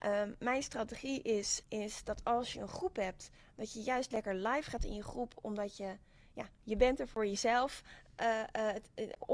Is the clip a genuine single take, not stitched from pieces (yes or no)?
no